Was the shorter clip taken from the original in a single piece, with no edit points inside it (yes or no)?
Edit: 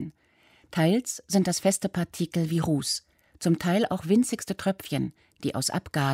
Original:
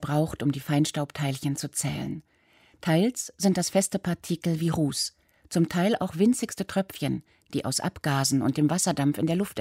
yes